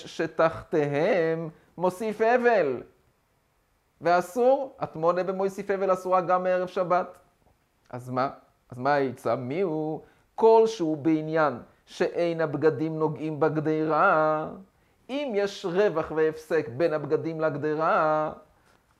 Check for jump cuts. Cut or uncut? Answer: uncut